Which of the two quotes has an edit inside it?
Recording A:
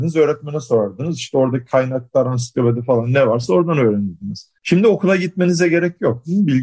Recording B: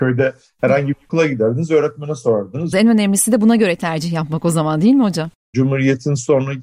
B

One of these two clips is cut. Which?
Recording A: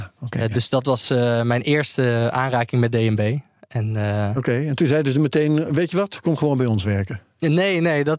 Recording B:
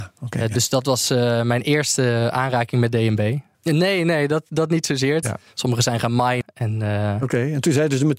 B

